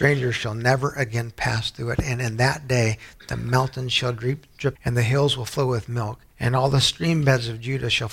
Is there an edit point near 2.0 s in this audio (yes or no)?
no